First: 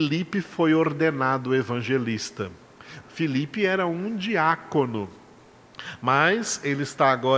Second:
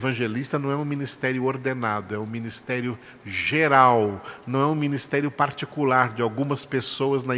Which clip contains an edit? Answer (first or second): first